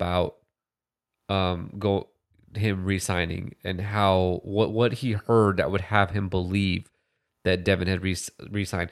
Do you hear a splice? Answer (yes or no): no